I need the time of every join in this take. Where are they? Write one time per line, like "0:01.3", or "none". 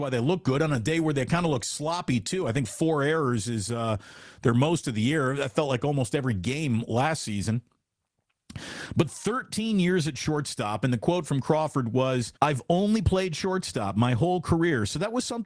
0:12.4